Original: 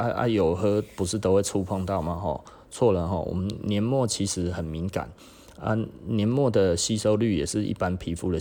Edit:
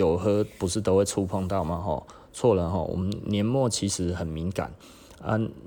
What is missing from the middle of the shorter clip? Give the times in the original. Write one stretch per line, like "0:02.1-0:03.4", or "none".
none